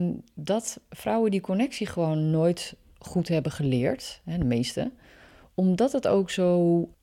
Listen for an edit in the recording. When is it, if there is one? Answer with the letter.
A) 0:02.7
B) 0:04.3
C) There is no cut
C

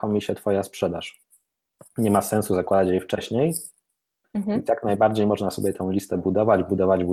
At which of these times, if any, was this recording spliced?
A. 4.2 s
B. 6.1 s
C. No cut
A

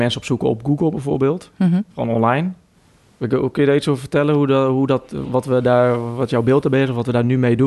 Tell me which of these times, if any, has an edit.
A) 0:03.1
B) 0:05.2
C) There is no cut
B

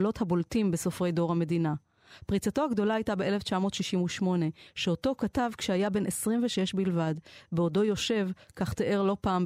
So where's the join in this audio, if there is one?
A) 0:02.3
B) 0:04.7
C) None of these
B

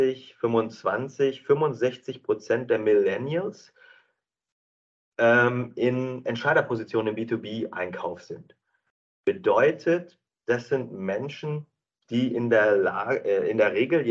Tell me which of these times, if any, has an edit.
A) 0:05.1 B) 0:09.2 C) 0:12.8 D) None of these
D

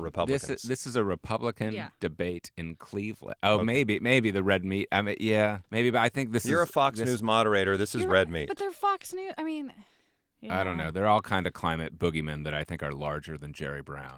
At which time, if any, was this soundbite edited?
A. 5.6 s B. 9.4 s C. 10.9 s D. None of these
A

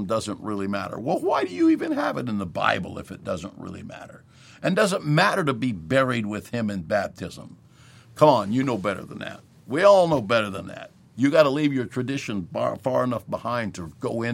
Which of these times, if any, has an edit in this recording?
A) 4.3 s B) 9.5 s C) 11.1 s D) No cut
D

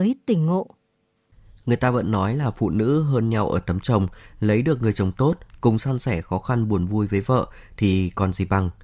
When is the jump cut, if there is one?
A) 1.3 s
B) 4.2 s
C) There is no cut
C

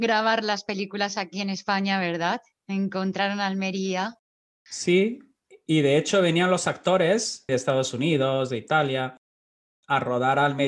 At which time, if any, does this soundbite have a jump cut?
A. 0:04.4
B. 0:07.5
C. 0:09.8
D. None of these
B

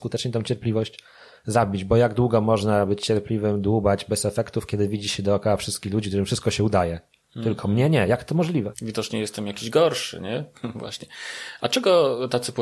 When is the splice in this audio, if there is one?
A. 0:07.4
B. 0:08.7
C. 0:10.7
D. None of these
B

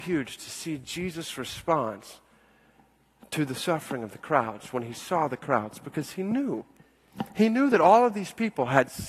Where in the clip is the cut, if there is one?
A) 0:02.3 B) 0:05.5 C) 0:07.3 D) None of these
D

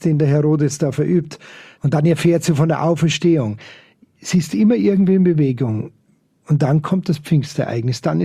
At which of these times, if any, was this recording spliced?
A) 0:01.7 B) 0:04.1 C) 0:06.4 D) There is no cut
A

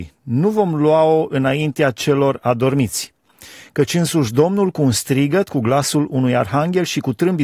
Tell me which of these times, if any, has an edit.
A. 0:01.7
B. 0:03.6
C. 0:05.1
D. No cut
D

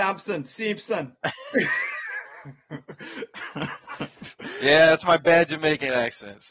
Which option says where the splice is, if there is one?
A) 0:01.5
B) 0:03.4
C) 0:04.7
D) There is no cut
A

